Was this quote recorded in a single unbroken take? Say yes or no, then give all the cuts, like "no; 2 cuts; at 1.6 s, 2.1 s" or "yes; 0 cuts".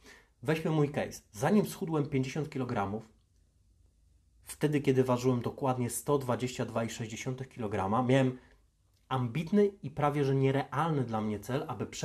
yes; 0 cuts